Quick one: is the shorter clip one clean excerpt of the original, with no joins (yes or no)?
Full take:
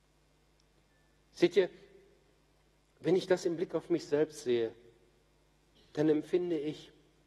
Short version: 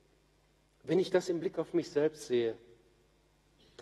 yes